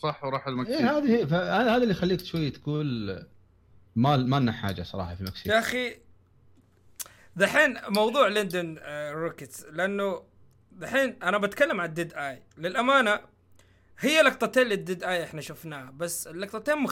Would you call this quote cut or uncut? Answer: uncut